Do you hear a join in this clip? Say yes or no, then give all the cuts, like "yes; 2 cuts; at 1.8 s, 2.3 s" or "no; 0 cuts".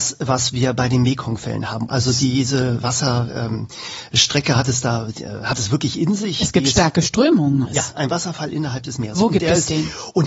yes; 2 cuts; at 1.9 s, 7.7 s